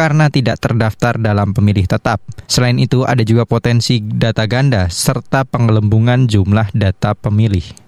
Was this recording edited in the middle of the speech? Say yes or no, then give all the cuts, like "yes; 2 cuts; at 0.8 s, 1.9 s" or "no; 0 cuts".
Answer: yes; 1 cut; at 2.4 s